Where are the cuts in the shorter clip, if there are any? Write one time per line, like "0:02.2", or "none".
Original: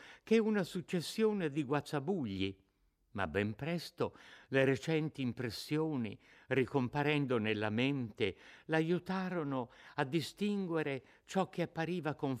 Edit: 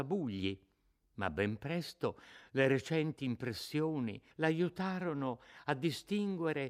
0:04.3